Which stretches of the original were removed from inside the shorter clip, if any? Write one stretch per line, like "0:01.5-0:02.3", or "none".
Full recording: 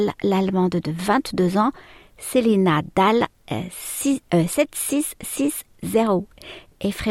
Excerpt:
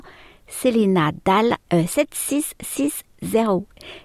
0:03.4-0:04.3